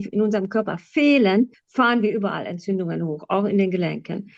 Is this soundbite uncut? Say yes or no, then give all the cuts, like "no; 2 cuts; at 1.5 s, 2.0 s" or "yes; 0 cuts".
yes; 0 cuts